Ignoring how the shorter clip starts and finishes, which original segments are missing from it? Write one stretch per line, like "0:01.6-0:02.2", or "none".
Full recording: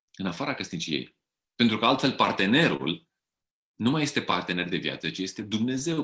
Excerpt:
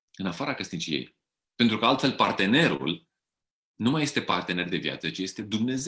none

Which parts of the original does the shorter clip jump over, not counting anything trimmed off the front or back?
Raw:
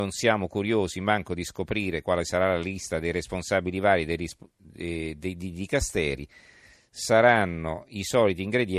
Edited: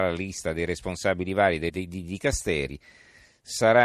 0:04.2-0:05.2

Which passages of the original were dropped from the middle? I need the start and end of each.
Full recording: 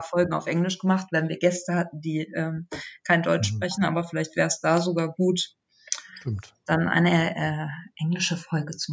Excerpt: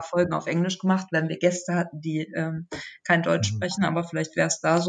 none

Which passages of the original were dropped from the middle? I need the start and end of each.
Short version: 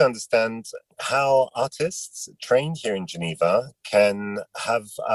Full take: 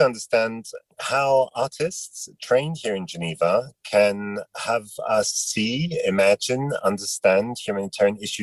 none

